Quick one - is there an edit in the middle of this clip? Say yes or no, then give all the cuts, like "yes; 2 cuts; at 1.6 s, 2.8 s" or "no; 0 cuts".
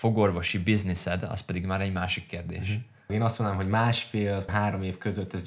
yes; 2 cuts; at 3.1 s, 4.5 s